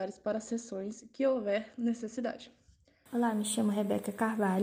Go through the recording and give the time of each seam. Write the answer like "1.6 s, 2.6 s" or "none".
3.1 s